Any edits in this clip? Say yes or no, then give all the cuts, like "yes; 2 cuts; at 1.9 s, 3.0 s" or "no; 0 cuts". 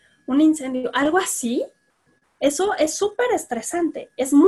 no; 0 cuts